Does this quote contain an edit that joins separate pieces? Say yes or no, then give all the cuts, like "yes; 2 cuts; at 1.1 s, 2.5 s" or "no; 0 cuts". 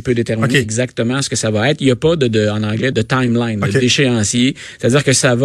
yes; 1 cut; at 2.9 s